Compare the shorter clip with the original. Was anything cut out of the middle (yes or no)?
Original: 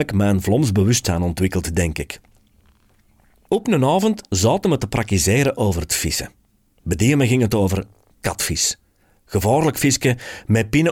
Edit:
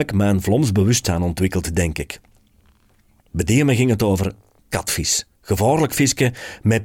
yes